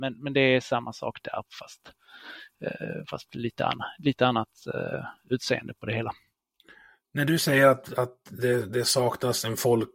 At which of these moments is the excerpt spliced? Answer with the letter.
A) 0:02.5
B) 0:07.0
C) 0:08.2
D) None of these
D